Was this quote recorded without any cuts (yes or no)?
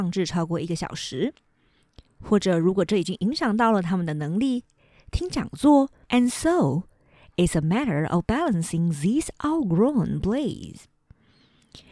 no